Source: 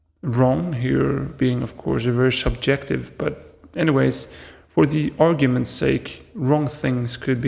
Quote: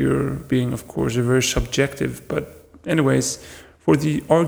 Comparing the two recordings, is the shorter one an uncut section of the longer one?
yes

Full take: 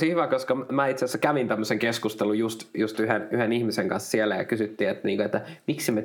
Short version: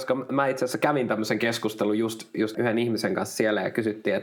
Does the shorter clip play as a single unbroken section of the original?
no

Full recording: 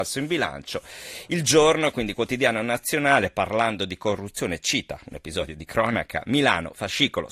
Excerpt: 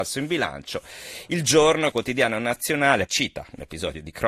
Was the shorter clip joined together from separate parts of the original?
yes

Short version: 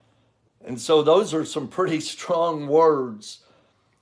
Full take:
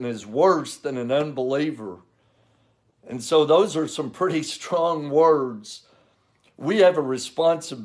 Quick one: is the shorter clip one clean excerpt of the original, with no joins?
yes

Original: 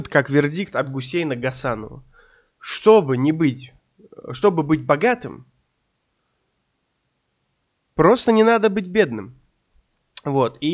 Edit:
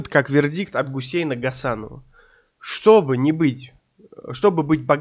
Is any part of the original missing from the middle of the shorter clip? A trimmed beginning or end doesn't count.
no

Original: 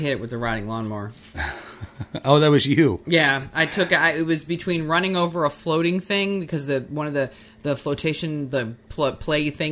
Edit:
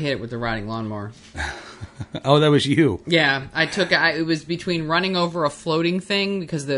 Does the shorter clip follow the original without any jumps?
yes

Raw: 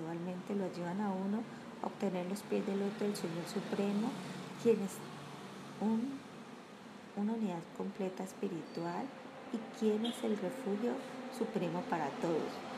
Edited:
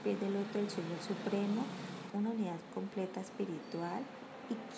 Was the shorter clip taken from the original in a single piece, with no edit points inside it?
no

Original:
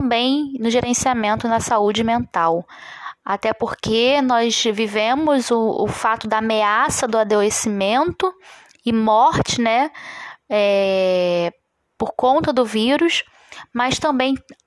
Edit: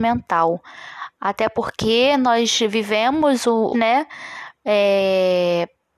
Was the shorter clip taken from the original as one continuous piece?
no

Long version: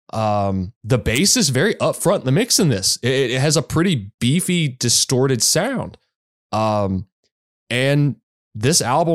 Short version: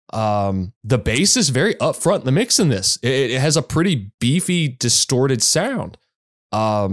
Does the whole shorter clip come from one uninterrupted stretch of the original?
yes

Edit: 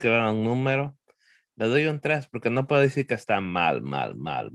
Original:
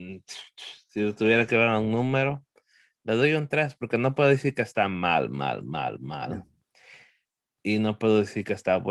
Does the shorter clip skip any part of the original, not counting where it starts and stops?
no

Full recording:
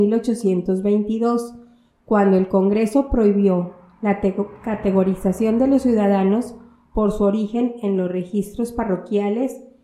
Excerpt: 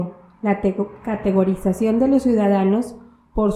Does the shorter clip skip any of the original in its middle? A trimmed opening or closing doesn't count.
no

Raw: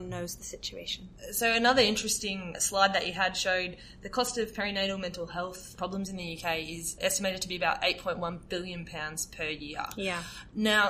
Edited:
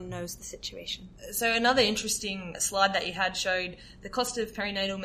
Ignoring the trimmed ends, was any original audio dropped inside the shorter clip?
no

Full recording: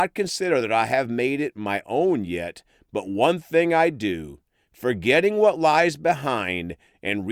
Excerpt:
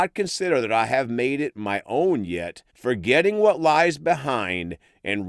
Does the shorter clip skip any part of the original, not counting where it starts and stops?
yes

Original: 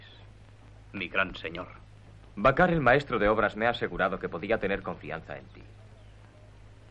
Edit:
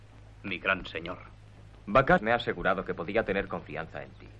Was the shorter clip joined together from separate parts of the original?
yes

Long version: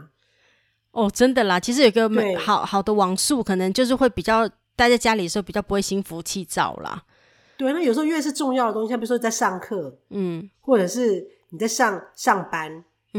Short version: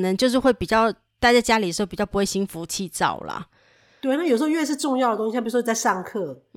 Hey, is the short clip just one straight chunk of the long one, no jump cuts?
yes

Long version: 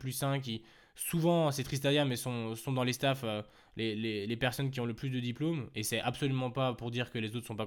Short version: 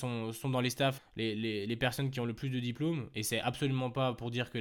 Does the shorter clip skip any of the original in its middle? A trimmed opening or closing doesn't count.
yes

